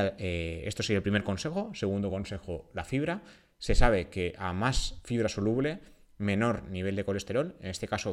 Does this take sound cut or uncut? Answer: uncut